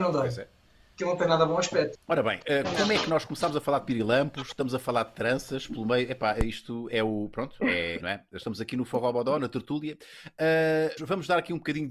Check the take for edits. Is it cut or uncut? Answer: cut